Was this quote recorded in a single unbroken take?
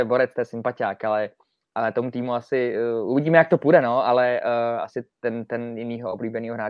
yes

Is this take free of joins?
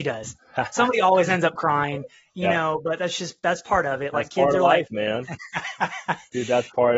yes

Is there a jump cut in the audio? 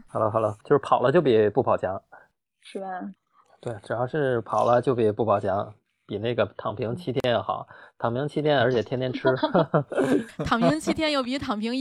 yes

